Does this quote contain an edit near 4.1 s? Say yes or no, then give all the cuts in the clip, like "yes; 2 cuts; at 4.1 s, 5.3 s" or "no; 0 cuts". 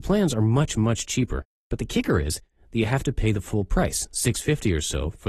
no; 0 cuts